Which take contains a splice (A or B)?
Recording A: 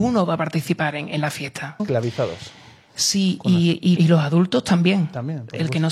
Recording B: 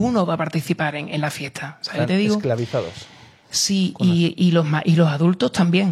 A